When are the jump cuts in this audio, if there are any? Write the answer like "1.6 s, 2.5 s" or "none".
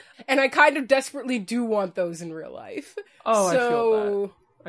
none

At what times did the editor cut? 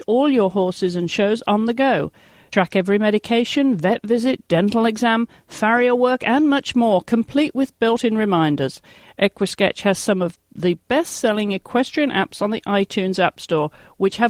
none

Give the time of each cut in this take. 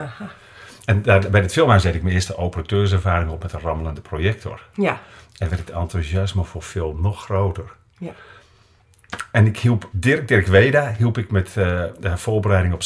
9.9 s

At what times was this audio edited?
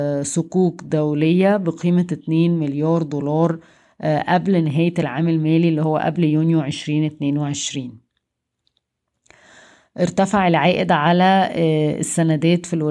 none

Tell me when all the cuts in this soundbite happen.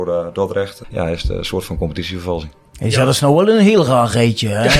none

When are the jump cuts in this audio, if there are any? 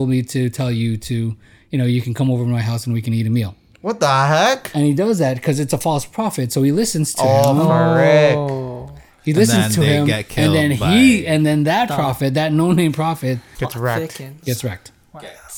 13.6 s

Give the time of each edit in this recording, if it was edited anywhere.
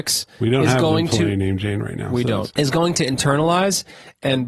2.5 s

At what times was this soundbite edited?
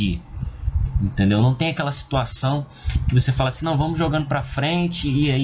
none

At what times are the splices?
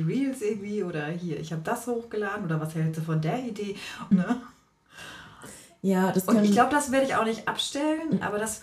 4.1 s

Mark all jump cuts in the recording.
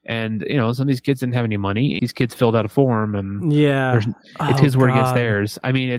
2.0 s

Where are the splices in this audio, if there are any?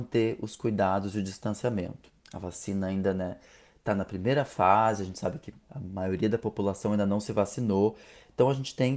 none

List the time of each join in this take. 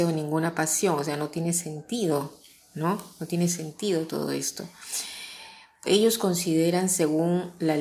5.8 s

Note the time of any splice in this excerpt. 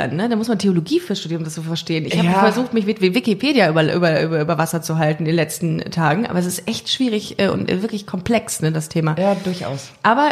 none

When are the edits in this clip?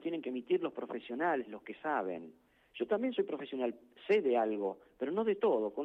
none

